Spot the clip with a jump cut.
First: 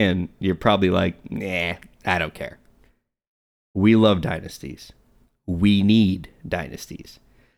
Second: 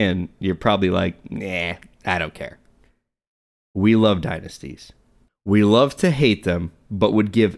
second; 1 cut; at 5.3 s

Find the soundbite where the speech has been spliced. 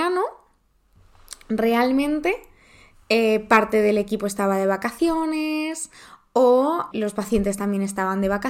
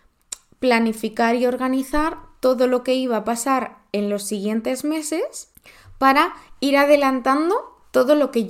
first; 1 cut; at 6.9 s

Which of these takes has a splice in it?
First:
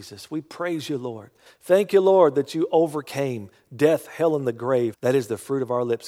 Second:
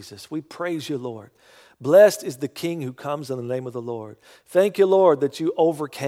first; 2 cuts; at 1.5 s, 4.9 s

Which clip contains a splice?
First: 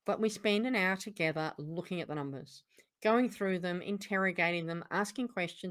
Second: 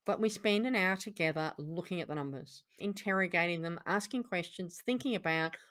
second; 1 cut; at 2.8 s

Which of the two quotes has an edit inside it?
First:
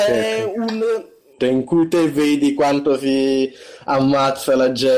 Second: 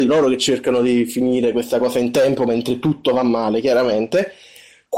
first; 1 cut; at 1.4 s

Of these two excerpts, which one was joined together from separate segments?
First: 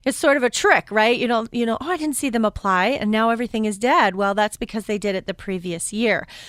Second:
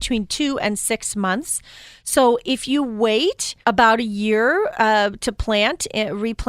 second; 1 cut; at 3.6 s

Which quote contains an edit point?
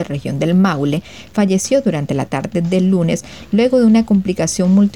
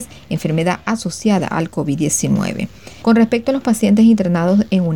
second; 1 cut; at 3.0 s

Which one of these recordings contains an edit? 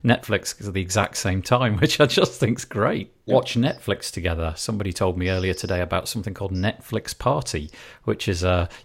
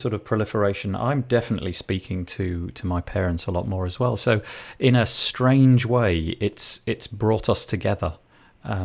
first; 1 cut; at 3.3 s

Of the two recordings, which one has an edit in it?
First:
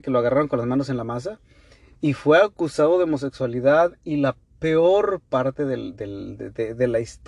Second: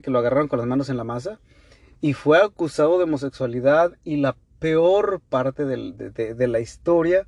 second; 1 cut; at 6.0 s

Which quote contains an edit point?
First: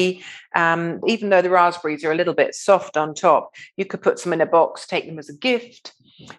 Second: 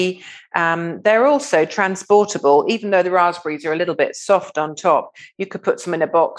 first; 1 cut; at 1.0 s

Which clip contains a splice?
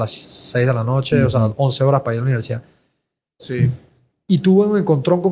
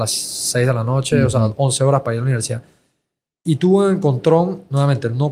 first; 1 cut; at 3.4 s

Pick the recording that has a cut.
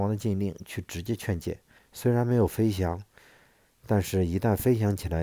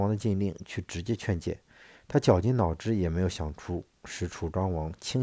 first; 1 cut; at 1.8 s

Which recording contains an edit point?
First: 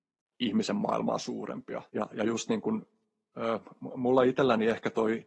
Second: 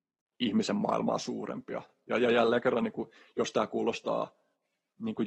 first; 1 cut; at 1.9 s

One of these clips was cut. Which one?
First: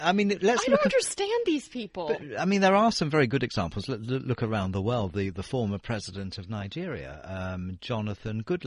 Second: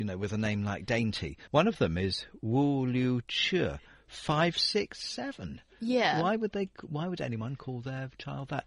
second; 1 cut; at 1.5 s

